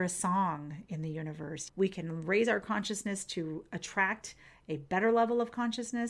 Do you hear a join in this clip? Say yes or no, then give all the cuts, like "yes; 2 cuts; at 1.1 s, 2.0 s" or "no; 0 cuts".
yes; 1 cut; at 1.7 s